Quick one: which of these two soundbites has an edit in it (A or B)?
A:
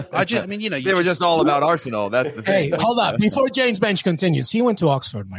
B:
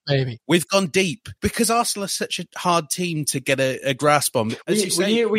B